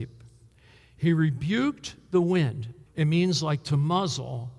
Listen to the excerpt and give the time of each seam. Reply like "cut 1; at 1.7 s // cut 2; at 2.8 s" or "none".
cut 1; at 2.9 s